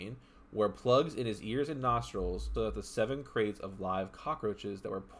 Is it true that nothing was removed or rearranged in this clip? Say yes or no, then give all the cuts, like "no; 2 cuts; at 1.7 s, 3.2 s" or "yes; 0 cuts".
no; 1 cut; at 2.6 s